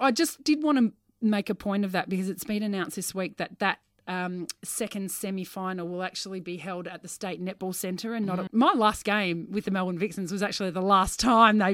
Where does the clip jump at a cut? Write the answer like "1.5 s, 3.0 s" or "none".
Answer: 8.5 s